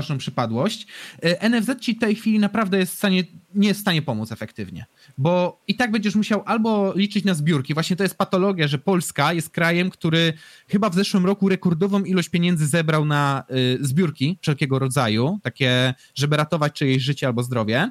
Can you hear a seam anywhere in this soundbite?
no; 0 cuts

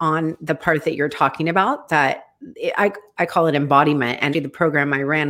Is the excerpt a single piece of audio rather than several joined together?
no; 1 cut; at 4.3 s

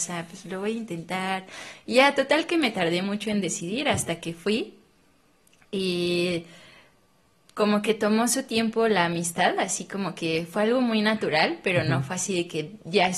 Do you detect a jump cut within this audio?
no; 0 cuts

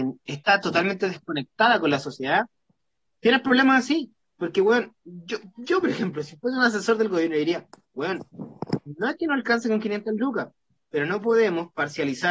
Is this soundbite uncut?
yes; 0 cuts

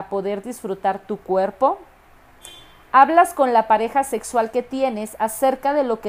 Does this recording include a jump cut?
no; 0 cuts

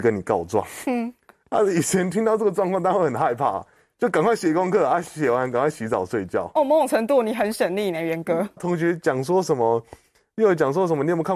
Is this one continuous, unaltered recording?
no; 1 cut; at 8.6 s

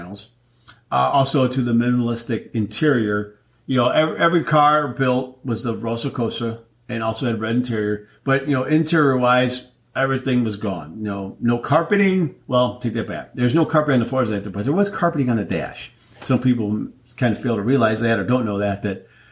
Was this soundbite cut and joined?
no; 0 cuts

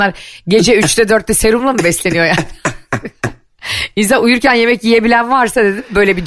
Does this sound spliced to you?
no; 0 cuts

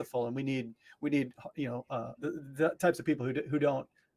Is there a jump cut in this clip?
yes; 1 cut; at 2.2 s

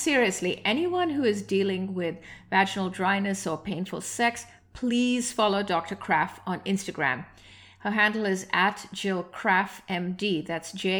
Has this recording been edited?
no; 0 cuts

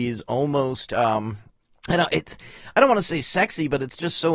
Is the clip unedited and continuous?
yes; 0 cuts

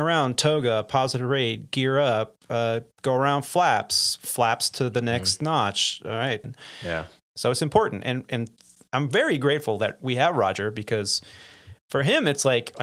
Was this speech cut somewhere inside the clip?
yes; 1 cut; at 6.4 s

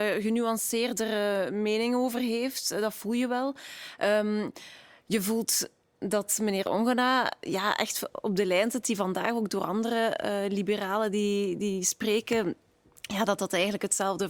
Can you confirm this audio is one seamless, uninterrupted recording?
yes; 0 cuts

